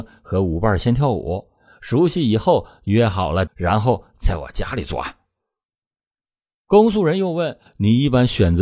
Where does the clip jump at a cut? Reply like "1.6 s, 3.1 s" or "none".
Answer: 3.5 s